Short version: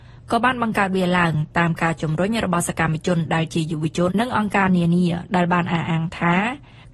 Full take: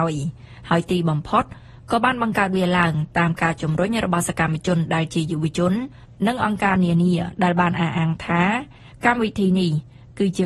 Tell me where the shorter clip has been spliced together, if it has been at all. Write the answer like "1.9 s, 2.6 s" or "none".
4.1 s